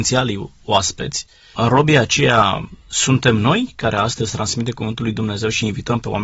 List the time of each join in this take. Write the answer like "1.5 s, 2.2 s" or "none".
none